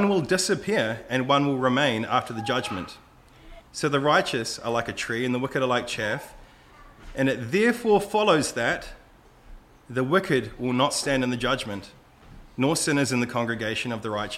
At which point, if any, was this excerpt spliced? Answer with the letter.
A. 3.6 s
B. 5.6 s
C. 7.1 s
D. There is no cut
A